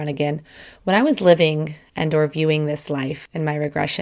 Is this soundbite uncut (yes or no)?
yes